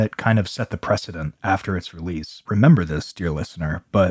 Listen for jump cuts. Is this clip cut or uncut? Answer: cut